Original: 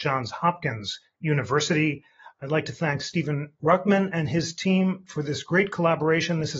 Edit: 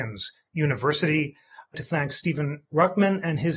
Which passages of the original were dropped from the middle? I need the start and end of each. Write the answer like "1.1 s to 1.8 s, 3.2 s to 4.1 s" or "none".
2.4 s to 2.6 s